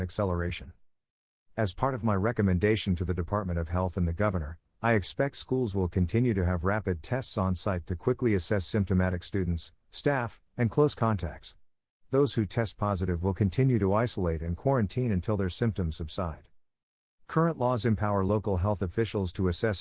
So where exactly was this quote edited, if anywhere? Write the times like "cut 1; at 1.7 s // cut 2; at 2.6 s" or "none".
none